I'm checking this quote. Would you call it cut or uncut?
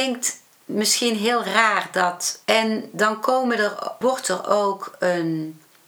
cut